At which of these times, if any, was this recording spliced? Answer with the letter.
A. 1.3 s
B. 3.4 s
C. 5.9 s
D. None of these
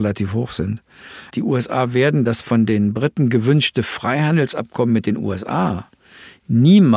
A